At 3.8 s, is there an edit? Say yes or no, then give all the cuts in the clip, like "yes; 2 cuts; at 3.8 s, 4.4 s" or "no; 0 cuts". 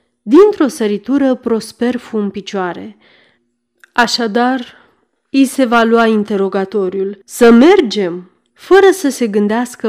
no; 2 cuts; at 7.2 s, 8.5 s